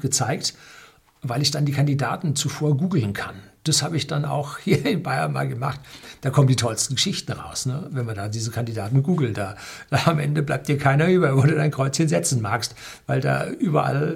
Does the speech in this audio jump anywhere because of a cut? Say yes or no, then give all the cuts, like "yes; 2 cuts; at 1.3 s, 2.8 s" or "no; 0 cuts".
no; 0 cuts